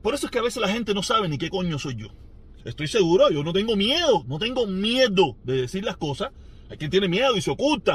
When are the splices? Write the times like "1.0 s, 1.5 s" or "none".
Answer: 2.6 s